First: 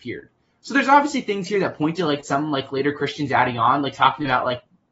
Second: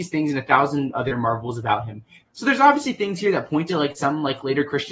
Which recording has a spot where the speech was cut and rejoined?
second; 1 cut; at 2.2 s

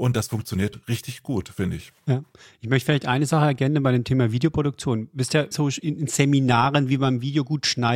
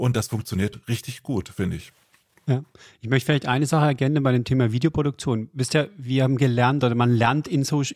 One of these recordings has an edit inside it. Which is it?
first; 2 cuts; at 2.0 s, 5.5 s

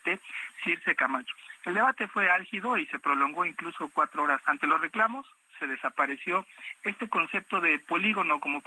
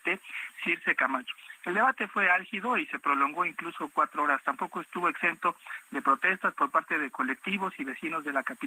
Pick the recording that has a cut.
first; 1 cut; at 4.4 s

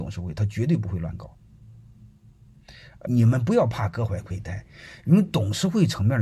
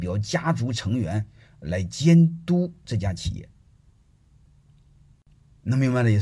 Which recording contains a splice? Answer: first; 1 cut; at 3.1 s

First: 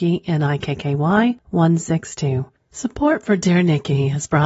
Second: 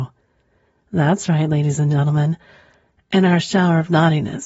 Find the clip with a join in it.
first; 1 cut; at 2.6 s

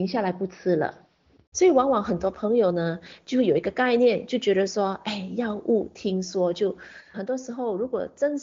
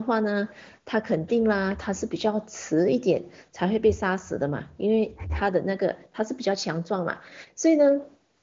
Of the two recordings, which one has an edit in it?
first; 2 cuts; at 1.5 s, 7.1 s

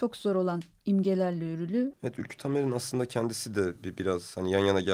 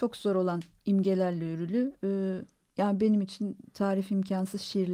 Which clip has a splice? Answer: first; 1 cut; at 1.9 s

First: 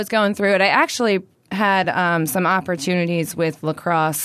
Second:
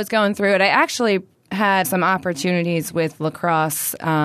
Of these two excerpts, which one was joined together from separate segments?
second; 1 cut; at 1.8 s

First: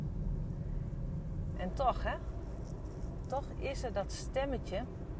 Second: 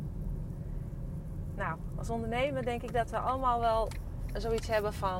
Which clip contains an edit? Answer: first; 1 cut; at 1.5 s

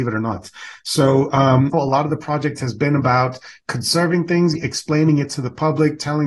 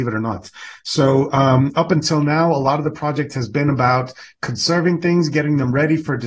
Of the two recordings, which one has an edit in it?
first; 2 cuts; at 1.7 s, 4.6 s

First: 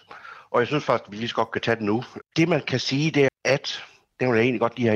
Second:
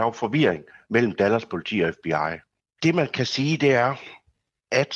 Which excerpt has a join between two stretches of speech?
first; 2 cuts; at 2.2 s, 3.3 s

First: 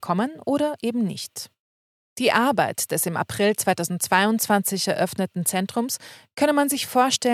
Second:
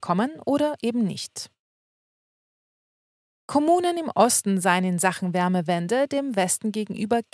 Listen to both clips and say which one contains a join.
first; 1 cut; at 2.1 s

